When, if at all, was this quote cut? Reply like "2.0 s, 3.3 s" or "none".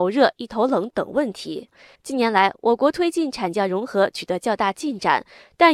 2.0 s